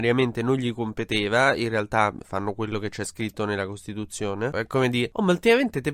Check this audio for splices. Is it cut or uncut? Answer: cut